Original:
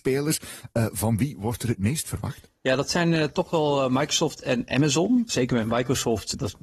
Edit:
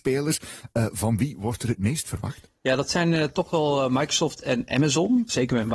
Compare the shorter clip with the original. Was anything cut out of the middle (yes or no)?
no